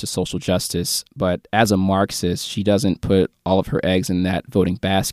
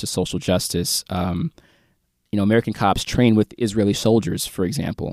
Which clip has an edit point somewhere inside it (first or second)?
first